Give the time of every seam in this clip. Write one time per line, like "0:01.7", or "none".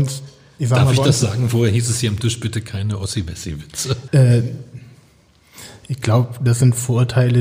0:04.1